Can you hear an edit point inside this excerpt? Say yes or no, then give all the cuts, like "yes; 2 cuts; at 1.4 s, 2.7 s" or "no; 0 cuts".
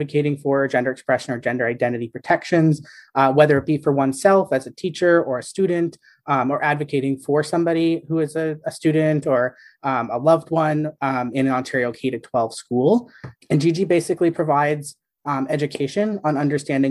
no; 0 cuts